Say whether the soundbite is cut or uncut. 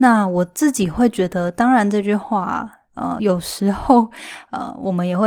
uncut